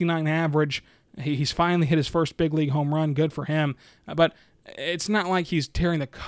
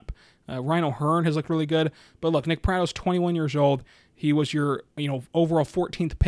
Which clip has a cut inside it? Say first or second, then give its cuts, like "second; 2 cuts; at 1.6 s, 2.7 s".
second; 1 cut; at 4.9 s